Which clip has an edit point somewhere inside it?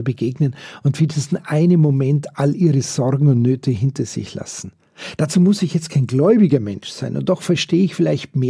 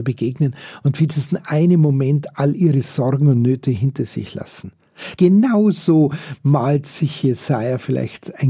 second; 1 cut; at 5.2 s

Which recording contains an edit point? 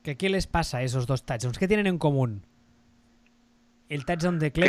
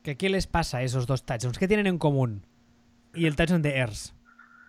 second; 1 cut; at 3.1 s

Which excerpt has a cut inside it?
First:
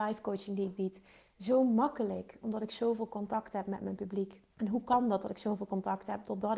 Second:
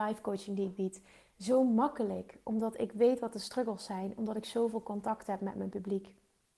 first; 2 cuts; at 2.4 s, 4.5 s

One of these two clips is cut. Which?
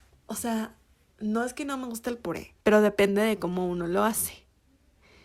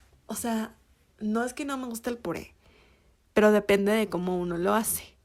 first; 1 cut; at 2.6 s

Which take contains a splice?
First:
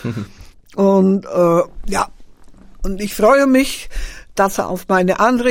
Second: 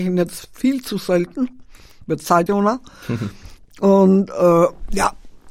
second; 1 cut; at 2.5 s

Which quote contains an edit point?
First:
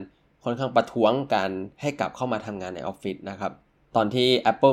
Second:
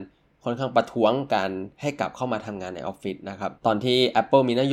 second; 1 cut; at 3.6 s

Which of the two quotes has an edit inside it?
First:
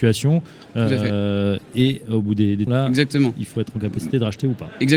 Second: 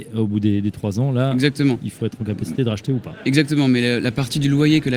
first; 1 cut; at 2.7 s

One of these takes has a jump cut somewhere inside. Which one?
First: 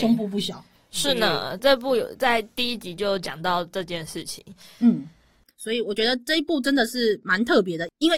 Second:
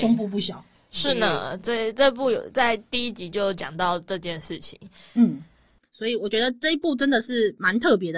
first; 1 cut; at 1.6 s

